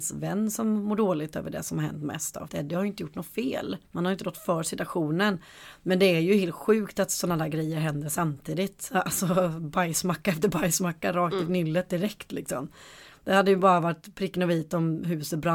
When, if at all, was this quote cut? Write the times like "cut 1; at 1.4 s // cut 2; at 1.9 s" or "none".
cut 1; at 2.5 s // cut 2; at 3.8 s